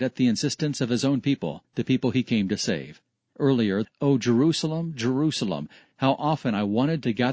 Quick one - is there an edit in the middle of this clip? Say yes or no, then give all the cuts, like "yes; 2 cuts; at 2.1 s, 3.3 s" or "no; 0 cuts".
yes; 2 cuts; at 3.8 s, 5.8 s